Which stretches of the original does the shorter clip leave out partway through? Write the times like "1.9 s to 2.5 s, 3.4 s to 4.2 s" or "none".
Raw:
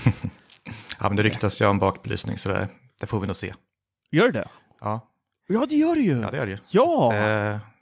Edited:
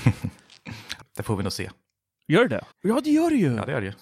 1.0 s to 2.8 s, 4.5 s to 5.4 s